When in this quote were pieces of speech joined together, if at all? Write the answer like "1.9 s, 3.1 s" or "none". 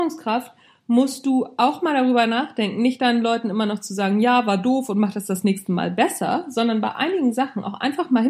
none